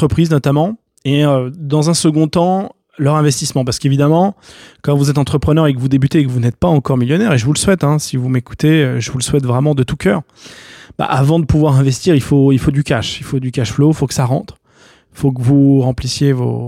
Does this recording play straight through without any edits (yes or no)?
yes